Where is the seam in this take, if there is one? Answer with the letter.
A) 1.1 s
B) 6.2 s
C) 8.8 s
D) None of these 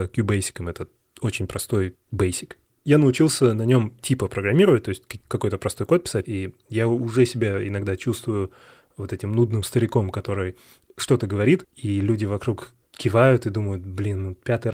B